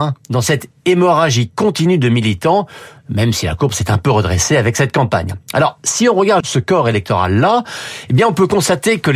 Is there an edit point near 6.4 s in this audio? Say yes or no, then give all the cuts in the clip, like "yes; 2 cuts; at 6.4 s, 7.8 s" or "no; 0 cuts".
yes; 1 cut; at 6.4 s